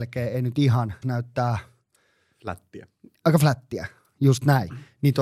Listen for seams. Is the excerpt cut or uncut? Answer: cut